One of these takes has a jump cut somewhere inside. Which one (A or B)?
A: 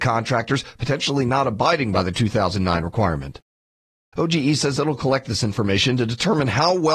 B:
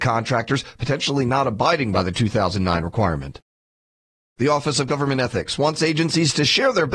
A